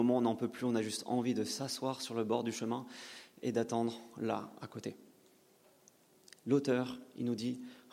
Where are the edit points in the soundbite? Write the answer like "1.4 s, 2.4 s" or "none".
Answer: none